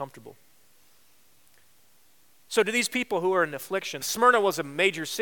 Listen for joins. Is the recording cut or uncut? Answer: cut